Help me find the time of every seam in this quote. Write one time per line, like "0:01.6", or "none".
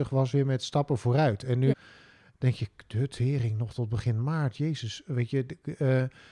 0:01.7